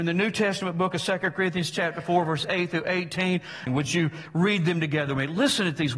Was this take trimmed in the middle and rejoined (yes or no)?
yes